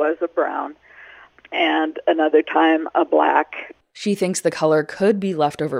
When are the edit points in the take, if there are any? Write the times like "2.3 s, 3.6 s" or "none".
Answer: none